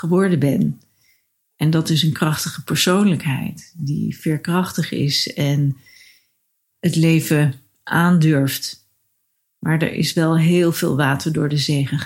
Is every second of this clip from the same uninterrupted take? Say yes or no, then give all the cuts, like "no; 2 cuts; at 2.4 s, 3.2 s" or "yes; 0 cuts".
yes; 0 cuts